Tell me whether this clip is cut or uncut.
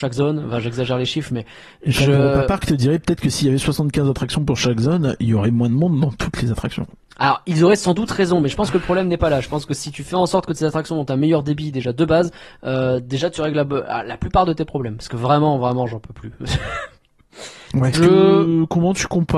cut